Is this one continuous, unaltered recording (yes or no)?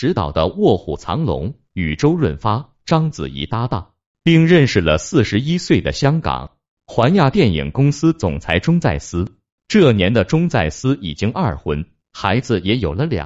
yes